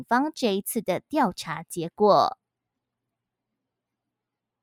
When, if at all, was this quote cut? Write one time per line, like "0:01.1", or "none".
none